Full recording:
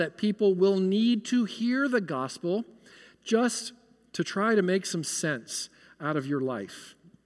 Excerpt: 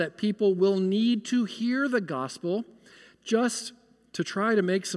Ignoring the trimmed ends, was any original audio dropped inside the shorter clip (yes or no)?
no